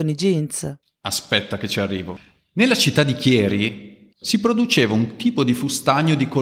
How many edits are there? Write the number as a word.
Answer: one